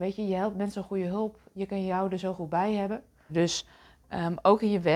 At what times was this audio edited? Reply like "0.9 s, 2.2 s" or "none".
3.3 s